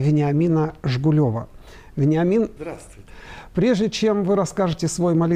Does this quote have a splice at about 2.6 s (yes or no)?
yes